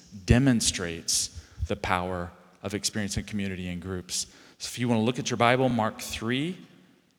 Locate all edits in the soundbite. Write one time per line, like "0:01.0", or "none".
none